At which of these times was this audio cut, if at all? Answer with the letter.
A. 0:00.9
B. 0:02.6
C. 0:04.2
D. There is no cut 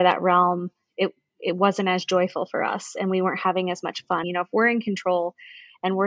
C